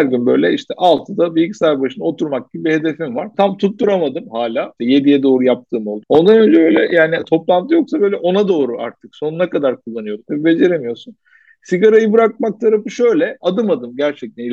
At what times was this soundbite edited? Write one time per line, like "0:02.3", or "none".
0:04.8
0:10.2